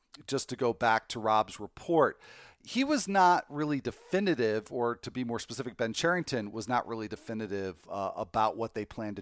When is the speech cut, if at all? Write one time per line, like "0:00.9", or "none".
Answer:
none